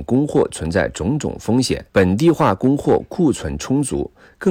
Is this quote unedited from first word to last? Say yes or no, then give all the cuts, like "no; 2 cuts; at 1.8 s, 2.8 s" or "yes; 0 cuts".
no; 1 cut; at 1.9 s